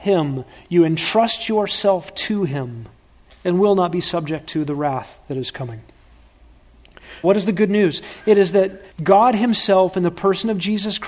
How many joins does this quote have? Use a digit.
3